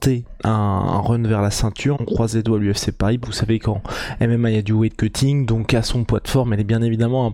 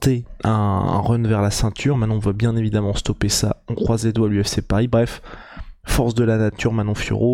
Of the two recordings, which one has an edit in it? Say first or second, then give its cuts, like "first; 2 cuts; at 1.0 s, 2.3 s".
first; 2 cuts; at 1.9 s, 3.2 s